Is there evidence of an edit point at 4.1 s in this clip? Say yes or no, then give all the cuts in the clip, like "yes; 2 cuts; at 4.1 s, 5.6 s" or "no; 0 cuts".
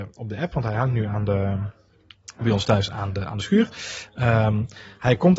no; 0 cuts